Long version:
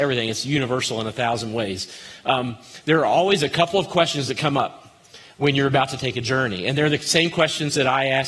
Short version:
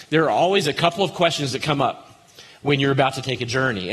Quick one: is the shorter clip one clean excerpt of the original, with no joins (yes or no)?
yes